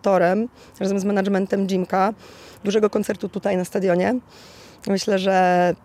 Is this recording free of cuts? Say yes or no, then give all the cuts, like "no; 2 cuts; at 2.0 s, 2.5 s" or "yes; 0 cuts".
yes; 0 cuts